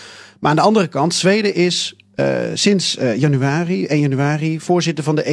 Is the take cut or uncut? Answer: uncut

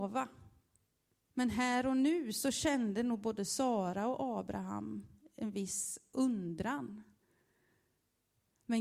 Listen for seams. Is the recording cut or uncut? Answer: cut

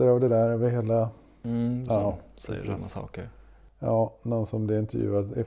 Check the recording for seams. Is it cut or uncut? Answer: cut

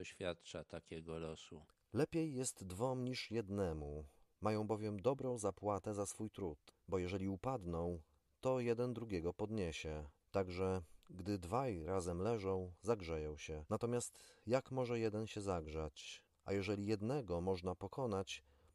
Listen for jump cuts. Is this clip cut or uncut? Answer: cut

